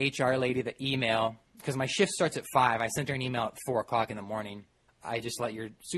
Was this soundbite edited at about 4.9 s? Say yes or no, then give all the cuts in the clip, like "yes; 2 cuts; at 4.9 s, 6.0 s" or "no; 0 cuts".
yes; 1 cut; at 4.9 s